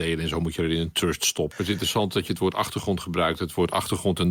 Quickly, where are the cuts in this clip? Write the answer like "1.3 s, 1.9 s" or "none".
1.5 s